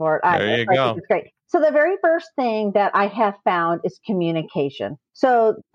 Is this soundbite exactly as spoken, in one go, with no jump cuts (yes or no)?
yes